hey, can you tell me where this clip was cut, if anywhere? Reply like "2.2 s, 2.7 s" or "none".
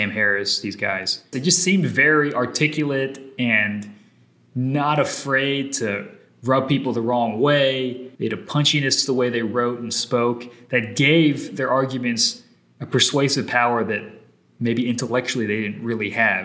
1.3 s, 8.1 s